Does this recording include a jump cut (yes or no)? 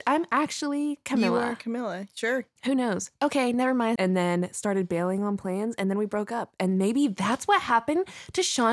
yes